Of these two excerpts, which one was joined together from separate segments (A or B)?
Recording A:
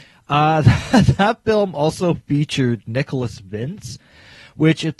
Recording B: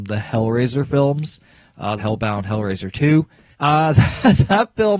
B